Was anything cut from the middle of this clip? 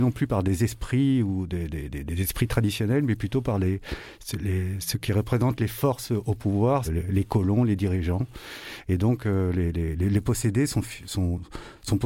yes; 1 cut; at 6.8 s

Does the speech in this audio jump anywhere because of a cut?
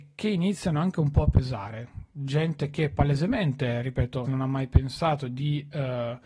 yes; 1 cut; at 4.2 s

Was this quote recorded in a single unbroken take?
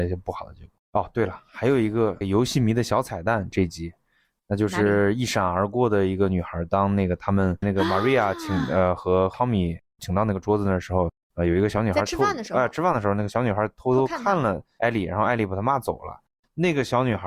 yes; 0 cuts

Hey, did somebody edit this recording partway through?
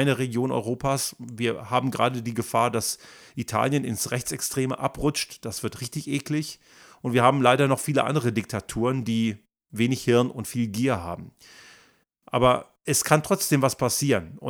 no; 0 cuts

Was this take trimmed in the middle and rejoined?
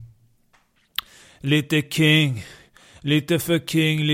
no; 0 cuts

